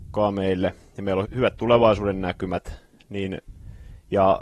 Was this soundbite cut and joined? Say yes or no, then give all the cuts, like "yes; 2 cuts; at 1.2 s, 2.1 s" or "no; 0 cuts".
yes; 1 cut; at 1.2 s